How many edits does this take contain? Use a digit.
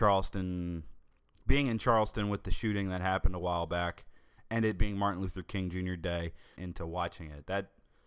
1